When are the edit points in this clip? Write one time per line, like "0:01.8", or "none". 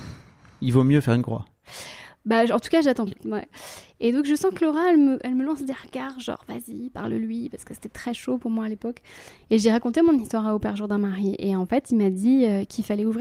0:03.1